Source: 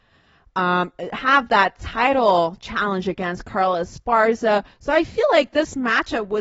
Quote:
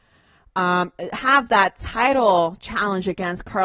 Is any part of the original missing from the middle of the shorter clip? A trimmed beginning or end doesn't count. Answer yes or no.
no